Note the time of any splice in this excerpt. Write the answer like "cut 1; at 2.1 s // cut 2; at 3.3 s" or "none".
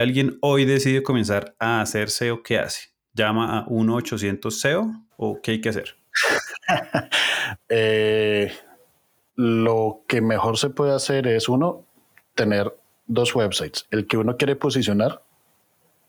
cut 1; at 7.6 s